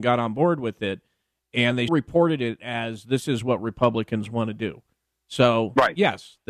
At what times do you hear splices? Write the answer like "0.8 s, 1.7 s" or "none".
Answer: 1.9 s